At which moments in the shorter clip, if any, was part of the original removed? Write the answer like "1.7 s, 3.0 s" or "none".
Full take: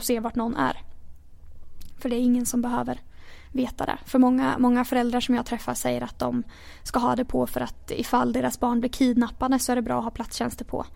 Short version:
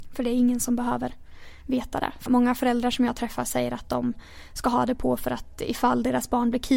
2.3 s